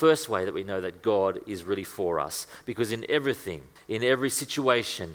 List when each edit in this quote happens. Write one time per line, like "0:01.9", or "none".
0:03.8

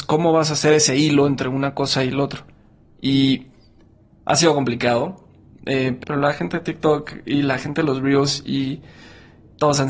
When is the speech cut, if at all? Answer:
0:06.0

